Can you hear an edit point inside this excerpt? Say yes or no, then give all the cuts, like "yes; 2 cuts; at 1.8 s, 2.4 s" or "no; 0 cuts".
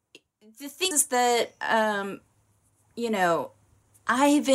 yes; 1 cut; at 0.9 s